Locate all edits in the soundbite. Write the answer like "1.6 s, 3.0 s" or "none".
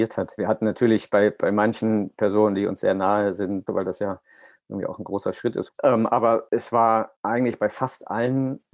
3.7 s, 5.7 s